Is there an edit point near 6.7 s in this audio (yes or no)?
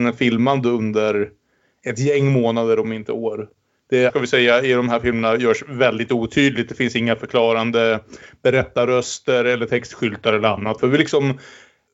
no